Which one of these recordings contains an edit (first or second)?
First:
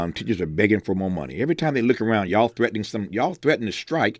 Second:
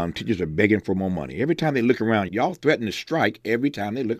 second